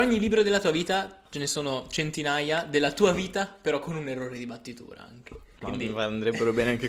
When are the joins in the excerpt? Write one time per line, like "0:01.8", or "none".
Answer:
0:05.6